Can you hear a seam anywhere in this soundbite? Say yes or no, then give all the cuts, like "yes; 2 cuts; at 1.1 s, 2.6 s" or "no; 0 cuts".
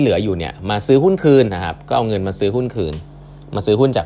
yes; 1 cut; at 1.5 s